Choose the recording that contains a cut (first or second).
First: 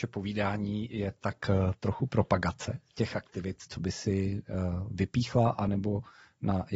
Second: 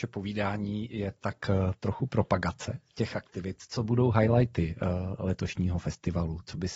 first